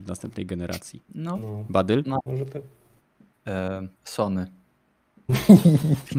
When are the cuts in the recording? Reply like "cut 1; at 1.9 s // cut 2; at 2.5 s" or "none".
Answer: cut 1; at 1.1 s // cut 2; at 4.0 s